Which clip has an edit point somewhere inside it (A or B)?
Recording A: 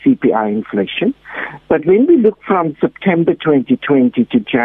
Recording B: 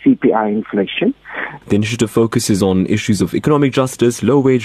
B